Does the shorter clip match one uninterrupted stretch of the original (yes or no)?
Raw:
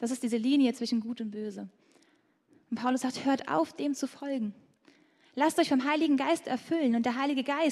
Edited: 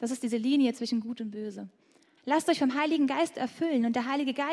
no